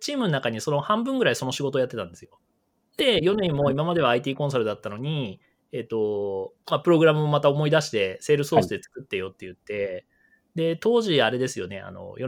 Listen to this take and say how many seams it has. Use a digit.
0